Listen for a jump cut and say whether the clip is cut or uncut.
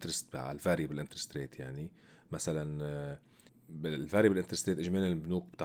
uncut